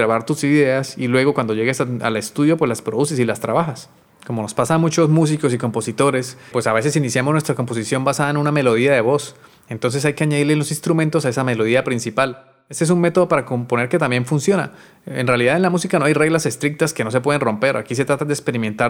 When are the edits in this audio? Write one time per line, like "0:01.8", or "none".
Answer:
0:06.5